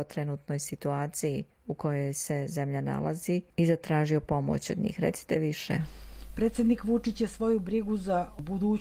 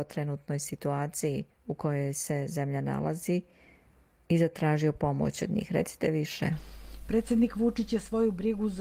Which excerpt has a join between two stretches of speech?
first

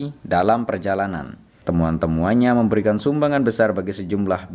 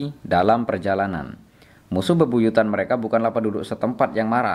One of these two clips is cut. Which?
first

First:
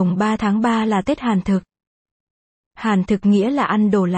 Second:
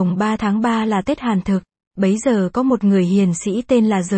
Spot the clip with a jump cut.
second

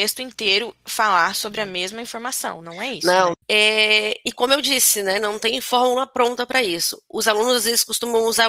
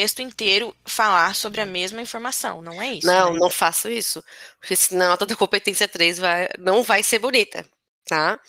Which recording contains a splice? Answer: first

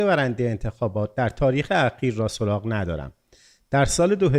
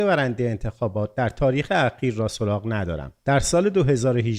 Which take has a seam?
second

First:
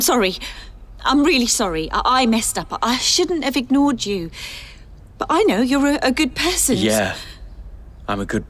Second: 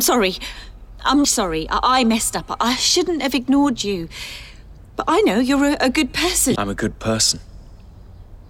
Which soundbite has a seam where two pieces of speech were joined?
second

